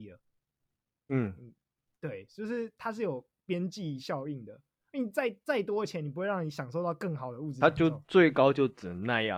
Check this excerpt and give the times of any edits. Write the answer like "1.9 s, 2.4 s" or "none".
none